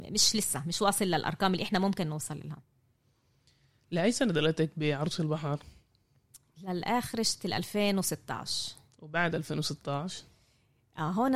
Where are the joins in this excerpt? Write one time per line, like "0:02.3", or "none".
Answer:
none